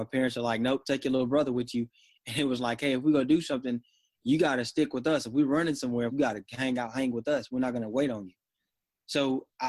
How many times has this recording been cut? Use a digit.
1